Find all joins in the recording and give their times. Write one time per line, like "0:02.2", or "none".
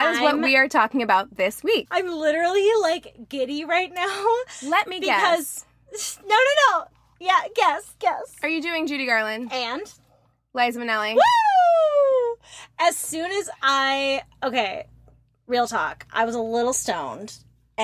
0:01.8